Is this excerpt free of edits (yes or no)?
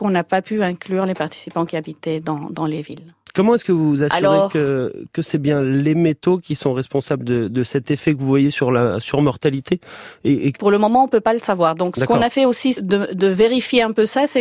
no